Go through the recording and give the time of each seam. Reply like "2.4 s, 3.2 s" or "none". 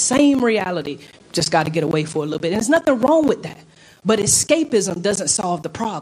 1.1 s